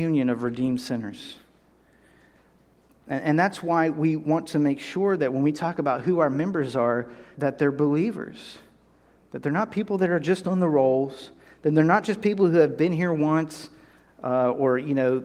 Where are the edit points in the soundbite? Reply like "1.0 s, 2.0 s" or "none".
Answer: 7.4 s